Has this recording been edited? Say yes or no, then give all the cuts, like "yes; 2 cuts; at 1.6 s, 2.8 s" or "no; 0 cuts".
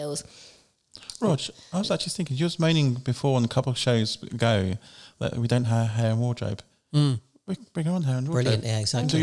no; 0 cuts